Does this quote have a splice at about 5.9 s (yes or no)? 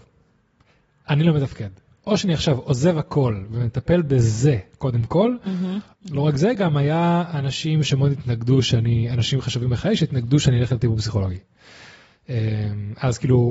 yes